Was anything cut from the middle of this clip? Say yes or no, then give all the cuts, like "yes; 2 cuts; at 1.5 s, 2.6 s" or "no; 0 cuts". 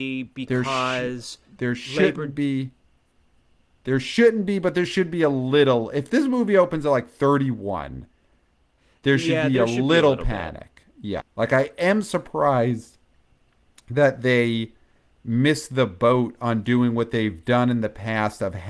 yes; 1 cut; at 11.2 s